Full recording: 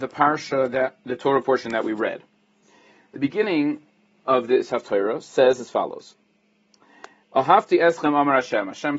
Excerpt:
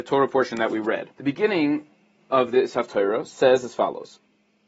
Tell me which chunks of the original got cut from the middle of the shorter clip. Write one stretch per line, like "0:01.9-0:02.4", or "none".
0:02.3-0:03.1